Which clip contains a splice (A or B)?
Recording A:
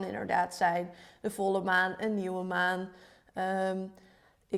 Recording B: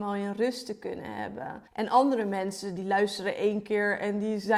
B